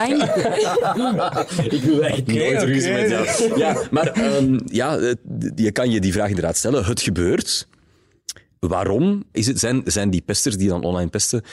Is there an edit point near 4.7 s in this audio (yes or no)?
yes